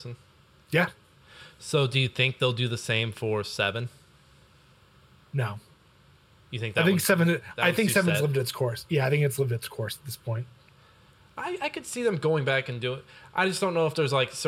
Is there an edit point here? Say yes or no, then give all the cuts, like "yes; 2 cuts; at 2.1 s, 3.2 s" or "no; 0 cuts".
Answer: no; 0 cuts